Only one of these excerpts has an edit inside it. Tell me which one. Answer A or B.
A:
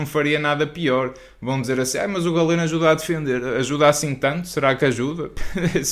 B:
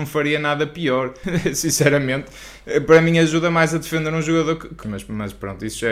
B